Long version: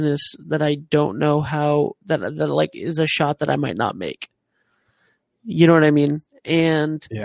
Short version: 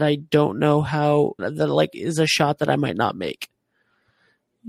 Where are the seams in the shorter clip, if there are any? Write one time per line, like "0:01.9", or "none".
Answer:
0:01.4